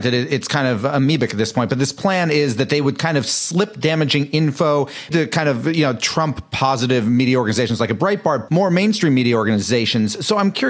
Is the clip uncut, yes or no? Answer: no